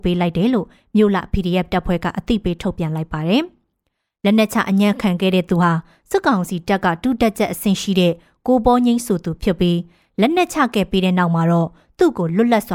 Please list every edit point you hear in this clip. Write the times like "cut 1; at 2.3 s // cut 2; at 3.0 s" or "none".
none